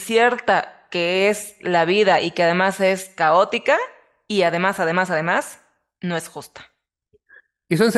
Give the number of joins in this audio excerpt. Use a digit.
0